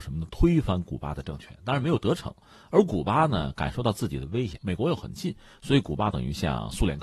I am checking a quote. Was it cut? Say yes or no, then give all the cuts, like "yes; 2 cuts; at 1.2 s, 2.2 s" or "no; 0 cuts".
yes; 1 cut; at 4.6 s